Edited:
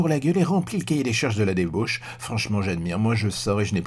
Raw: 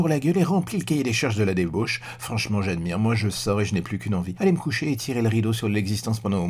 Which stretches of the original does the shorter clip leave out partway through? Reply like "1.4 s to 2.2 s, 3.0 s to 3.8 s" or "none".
none